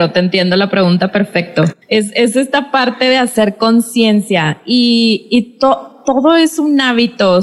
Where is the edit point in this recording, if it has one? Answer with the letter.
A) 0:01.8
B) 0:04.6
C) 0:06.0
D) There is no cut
A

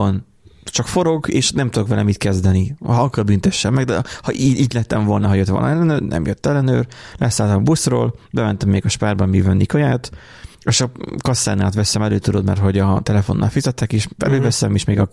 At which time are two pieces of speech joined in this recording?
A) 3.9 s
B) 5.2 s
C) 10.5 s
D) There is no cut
C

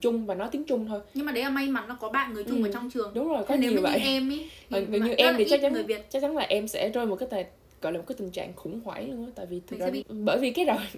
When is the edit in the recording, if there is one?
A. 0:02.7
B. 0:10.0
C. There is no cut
B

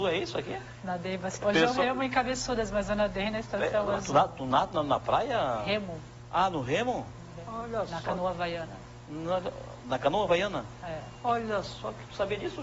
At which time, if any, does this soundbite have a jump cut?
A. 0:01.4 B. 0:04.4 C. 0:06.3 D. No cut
A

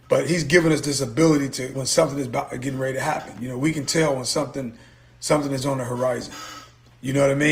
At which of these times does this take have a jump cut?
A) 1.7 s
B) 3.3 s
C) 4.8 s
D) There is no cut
A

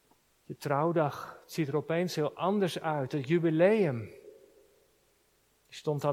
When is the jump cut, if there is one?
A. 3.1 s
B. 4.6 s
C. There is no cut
C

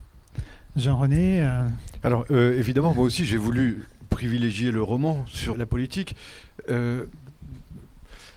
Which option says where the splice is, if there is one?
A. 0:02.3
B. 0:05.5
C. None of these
B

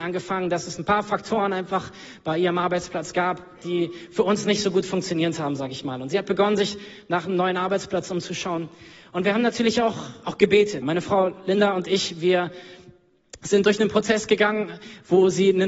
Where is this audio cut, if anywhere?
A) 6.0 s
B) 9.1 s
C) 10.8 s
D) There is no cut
C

